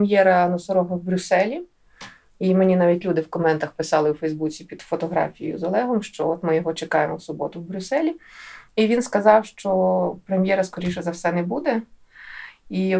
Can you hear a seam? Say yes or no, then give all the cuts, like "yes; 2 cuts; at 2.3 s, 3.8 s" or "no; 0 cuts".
no; 0 cuts